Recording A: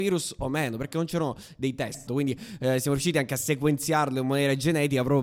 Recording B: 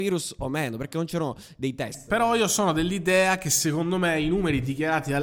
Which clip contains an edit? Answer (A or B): A